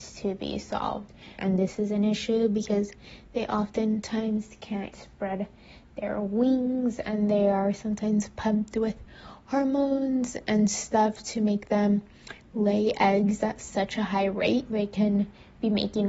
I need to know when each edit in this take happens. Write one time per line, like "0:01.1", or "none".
0:01.4
0:04.9
0:14.7